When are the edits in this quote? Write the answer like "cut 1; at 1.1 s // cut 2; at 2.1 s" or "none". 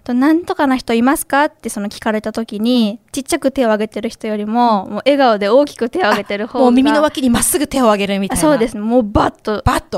none